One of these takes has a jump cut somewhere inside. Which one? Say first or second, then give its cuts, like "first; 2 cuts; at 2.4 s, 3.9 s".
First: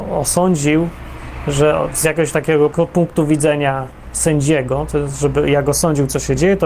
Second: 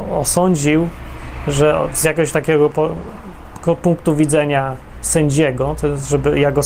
first; 1 cut; at 2.7 s